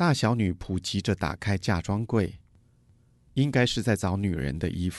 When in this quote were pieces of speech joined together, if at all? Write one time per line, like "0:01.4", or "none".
none